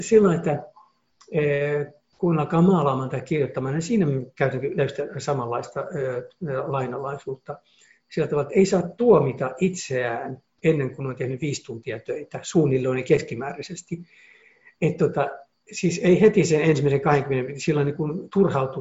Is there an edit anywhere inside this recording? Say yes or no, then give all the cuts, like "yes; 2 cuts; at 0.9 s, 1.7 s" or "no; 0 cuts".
no; 0 cuts